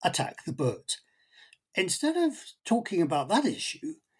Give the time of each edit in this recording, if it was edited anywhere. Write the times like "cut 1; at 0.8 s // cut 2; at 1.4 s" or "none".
none